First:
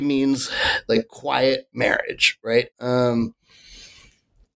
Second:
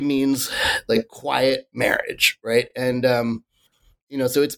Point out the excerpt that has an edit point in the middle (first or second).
first